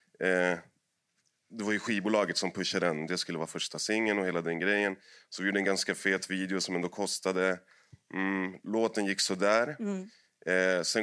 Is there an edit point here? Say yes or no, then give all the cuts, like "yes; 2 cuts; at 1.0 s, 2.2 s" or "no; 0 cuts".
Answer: no; 0 cuts